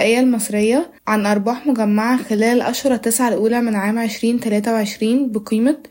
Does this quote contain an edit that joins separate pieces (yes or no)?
yes